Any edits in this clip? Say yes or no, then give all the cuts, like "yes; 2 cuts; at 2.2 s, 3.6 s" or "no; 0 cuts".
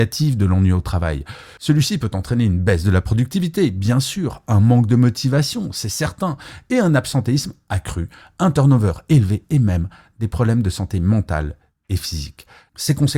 no; 0 cuts